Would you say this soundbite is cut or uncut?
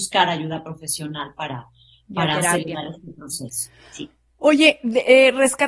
uncut